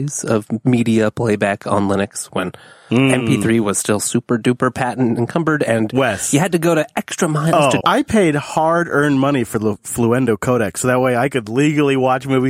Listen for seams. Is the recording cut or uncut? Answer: cut